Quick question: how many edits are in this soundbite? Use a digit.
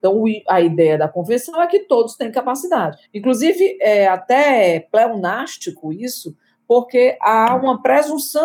1